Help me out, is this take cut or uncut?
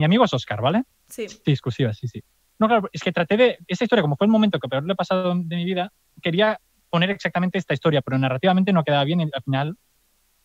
uncut